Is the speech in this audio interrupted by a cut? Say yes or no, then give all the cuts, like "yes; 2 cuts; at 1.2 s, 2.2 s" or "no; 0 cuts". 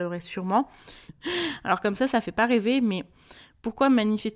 yes; 1 cut; at 1.1 s